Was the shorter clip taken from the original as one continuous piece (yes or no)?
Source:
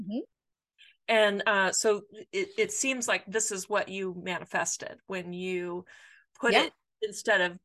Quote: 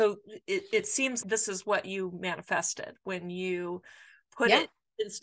no